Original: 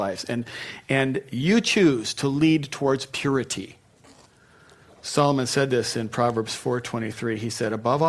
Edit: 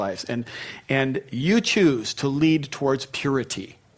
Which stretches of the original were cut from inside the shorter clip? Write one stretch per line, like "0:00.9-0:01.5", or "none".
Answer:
none

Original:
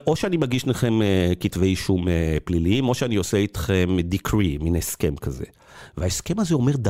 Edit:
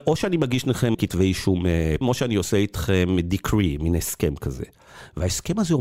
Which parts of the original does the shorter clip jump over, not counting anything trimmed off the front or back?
0:00.9-0:01.4
0:02.4-0:02.8

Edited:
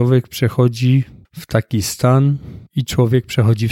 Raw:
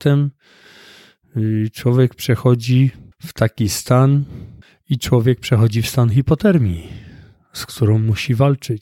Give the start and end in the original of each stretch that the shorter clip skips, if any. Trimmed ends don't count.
0:04.5-0:04.8

